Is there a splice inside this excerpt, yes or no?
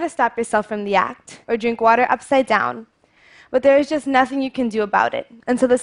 yes